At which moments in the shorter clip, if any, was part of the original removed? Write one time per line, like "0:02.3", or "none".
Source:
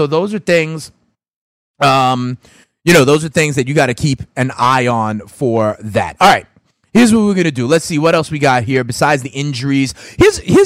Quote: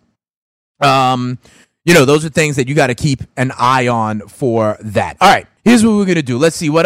0:05.6